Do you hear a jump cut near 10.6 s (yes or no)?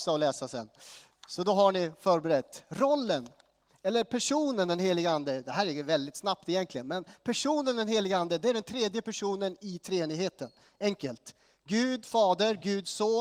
no